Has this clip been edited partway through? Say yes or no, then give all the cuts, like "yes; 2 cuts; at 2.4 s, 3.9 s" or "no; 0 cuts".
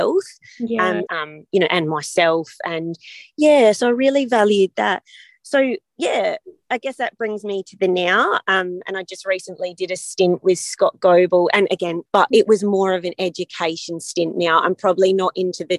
yes; 2 cuts; at 1.1 s, 12.1 s